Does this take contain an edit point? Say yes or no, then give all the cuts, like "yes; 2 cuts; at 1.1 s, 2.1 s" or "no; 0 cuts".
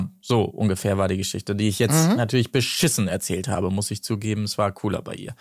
no; 0 cuts